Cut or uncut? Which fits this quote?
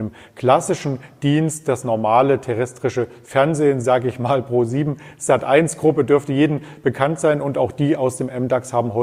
uncut